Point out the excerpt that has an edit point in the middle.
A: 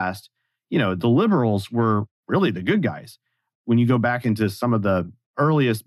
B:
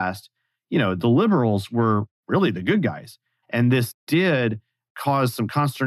B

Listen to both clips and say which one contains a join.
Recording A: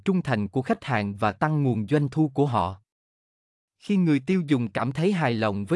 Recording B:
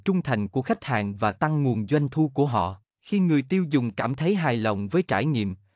B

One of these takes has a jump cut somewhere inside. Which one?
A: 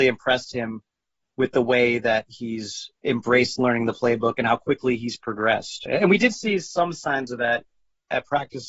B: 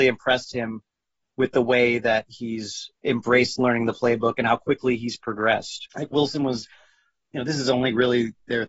B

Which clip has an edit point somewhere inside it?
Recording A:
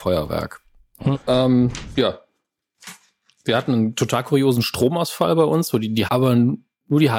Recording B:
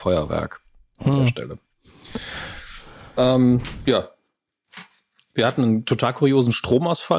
A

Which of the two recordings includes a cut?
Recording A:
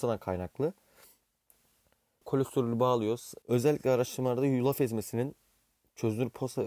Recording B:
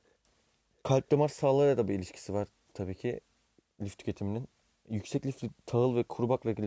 A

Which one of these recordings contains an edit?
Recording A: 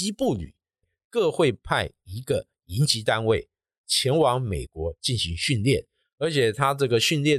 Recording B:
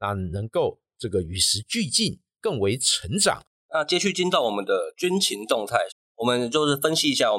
B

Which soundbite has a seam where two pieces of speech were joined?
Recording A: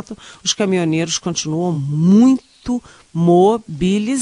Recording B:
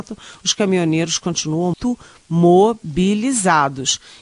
B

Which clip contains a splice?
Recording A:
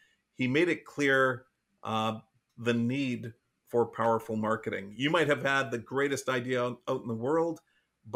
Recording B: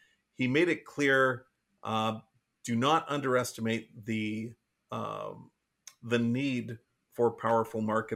A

